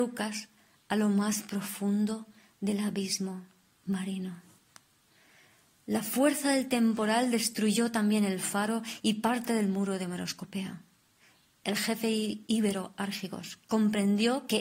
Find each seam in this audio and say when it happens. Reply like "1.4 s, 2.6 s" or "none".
none